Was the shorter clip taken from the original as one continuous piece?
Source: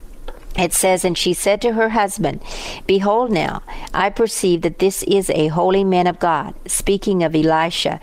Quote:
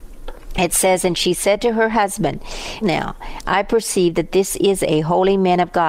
no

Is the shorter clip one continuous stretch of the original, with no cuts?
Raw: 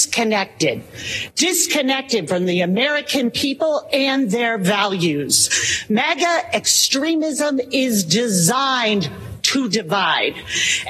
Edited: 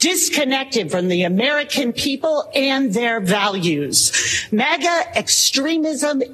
yes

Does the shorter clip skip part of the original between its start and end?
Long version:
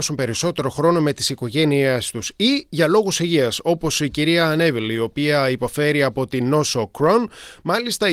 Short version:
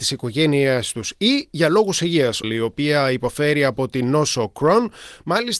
yes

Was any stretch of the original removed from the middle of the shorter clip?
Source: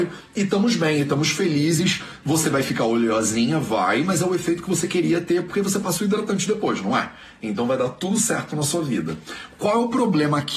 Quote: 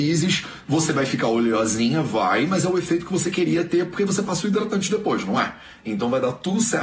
no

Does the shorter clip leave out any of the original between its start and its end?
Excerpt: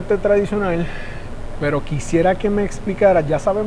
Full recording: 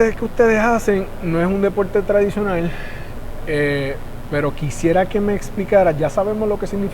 yes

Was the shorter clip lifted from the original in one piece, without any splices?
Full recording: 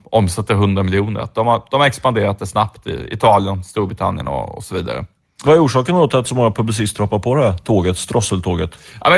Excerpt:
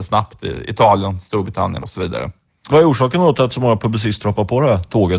no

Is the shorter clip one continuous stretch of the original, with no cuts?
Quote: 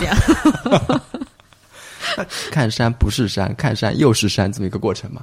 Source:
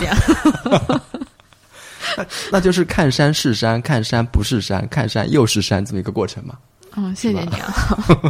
no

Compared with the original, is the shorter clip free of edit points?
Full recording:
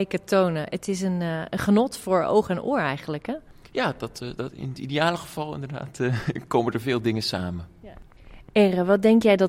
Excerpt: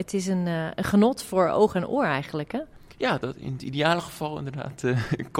no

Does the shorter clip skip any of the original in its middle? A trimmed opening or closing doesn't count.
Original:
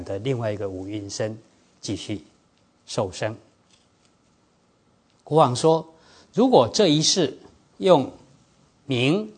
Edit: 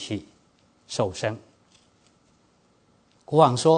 no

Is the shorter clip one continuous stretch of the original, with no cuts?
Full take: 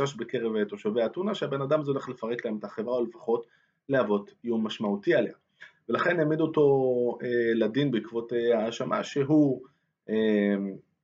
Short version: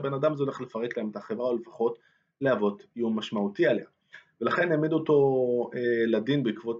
yes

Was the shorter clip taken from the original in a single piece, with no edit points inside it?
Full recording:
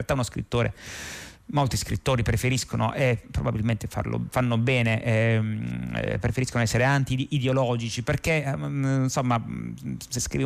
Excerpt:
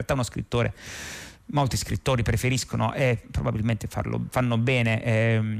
yes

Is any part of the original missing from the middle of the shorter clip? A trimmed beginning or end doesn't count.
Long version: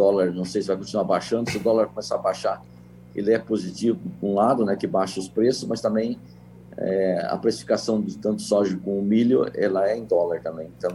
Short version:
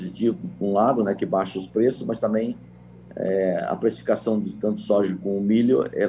no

